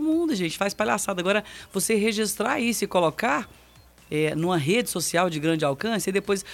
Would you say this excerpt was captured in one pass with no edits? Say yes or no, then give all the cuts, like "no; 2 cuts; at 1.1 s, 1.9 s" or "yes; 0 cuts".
yes; 0 cuts